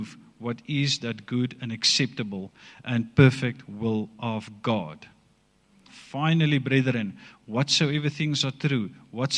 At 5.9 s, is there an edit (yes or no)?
yes